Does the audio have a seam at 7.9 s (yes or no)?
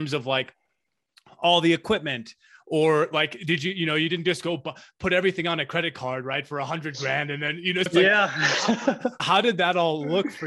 yes